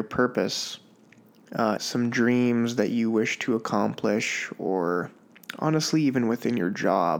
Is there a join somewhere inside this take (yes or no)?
yes